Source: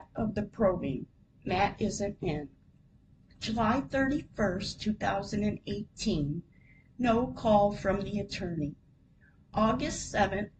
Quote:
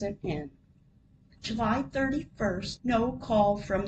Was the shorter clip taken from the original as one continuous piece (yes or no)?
no